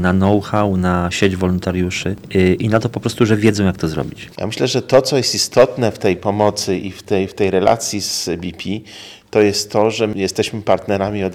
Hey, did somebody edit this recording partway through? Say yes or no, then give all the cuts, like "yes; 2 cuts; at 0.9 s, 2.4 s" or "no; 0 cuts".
yes; 1 cut; at 4.3 s